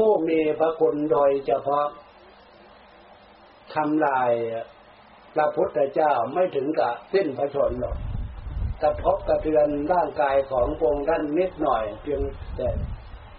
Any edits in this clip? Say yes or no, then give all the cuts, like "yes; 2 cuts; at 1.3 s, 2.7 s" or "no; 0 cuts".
no; 0 cuts